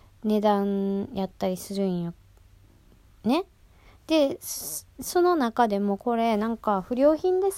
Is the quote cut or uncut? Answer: uncut